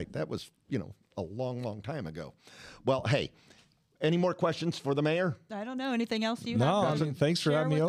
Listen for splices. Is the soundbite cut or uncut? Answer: uncut